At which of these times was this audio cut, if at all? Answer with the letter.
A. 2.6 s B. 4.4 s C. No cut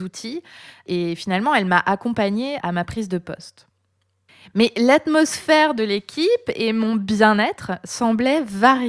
A